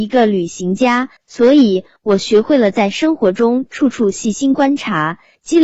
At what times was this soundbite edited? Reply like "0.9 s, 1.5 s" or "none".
1.2 s

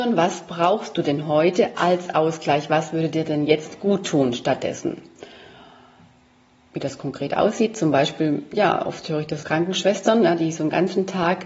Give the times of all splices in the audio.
9.4 s

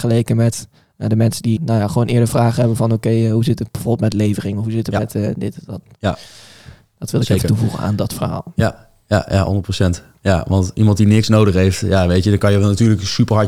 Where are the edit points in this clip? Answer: 1.6 s

